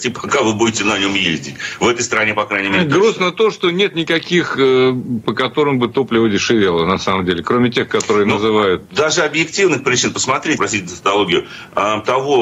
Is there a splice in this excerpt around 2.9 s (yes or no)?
no